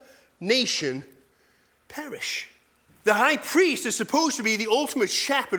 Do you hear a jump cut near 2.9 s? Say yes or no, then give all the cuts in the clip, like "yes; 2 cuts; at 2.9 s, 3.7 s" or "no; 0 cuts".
yes; 1 cut; at 2.9 s